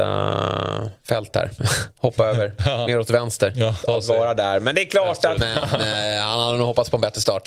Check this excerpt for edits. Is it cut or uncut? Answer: cut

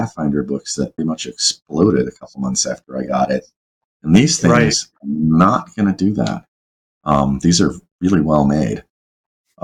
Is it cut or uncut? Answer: cut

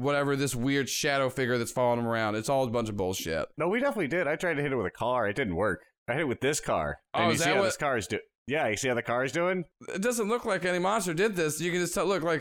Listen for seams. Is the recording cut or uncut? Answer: uncut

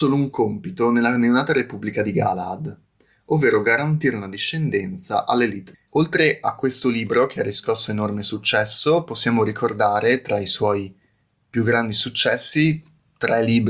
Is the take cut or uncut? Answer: cut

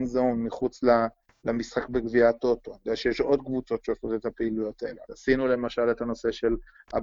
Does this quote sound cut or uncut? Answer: cut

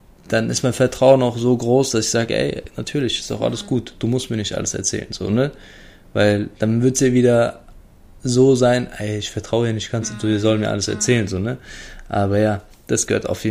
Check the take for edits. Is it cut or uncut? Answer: uncut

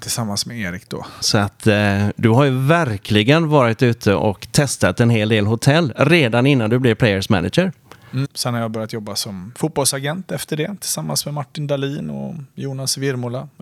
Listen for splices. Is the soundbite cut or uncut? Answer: cut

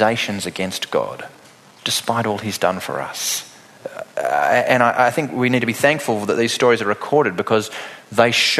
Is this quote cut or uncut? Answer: uncut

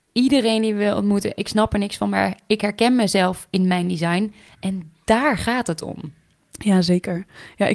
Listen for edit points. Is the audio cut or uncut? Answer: uncut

